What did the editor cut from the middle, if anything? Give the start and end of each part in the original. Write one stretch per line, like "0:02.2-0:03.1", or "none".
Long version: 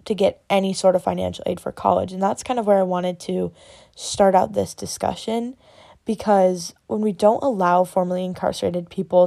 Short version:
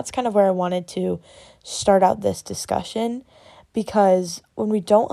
none